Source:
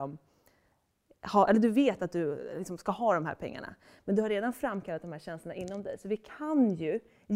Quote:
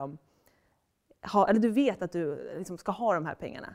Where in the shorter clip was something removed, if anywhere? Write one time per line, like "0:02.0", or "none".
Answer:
none